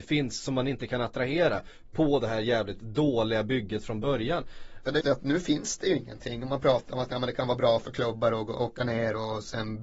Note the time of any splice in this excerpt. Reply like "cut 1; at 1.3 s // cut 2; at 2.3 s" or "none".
cut 1; at 5.0 s